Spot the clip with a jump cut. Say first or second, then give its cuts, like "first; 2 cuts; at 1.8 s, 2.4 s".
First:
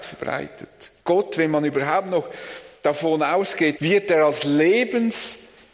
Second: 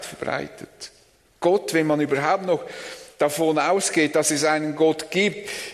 first; 2 cuts; at 1.0 s, 3.8 s